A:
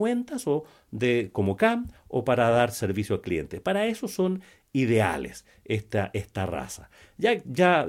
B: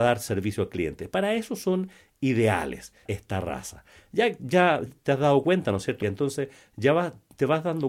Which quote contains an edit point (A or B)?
B